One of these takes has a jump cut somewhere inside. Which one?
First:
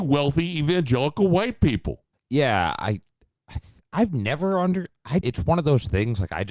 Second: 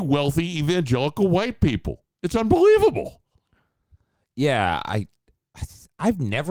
first; 2 cuts; at 2.1 s, 5.2 s

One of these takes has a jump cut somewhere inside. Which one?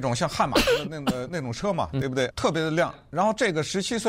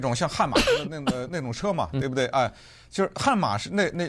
first; 1 cut; at 2.3 s

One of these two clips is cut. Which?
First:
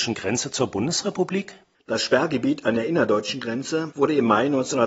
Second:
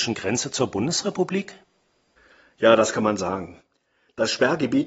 first; 1 cut; at 1.7 s

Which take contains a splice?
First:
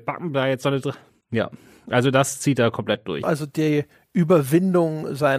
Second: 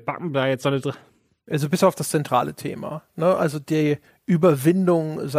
first; 2 cuts; at 1.2 s, 3.2 s

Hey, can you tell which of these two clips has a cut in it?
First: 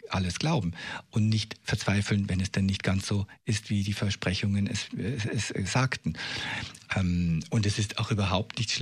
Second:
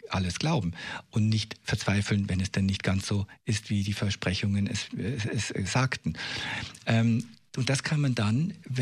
first; 1 cut; at 6.8 s

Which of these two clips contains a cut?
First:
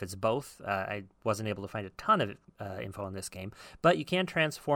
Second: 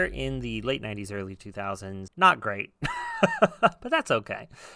second; 1 cut; at 2.1 s

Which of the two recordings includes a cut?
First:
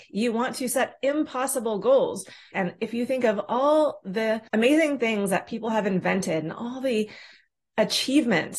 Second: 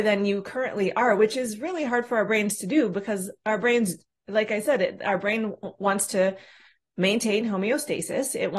first; 2 cuts; at 2.5 s, 4.5 s

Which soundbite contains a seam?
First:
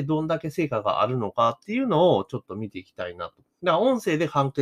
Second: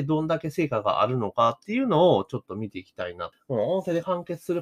second; 1 cut; at 3.3 s

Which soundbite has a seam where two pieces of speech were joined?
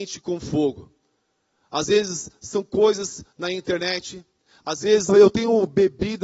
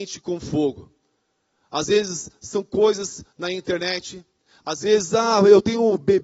first; 1 cut; at 5.1 s

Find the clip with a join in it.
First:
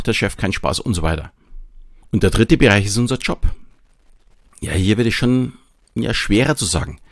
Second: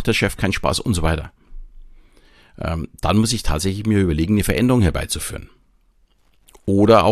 first; 1 cut; at 2.0 s

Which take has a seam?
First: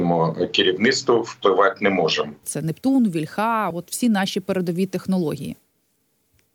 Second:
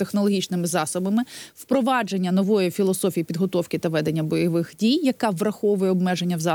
first; 2 cuts; at 2.4 s, 3.7 s

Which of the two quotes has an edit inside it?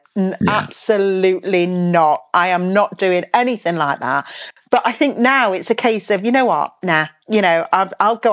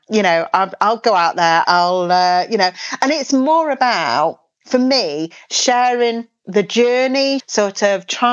second; 2 cuts; at 1.6 s, 7.4 s

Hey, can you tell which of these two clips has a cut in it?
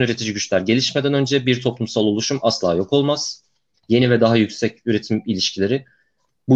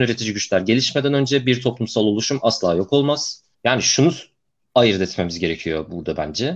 second; 1 cut; at 3.5 s

